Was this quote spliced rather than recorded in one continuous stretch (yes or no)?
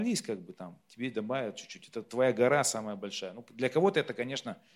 no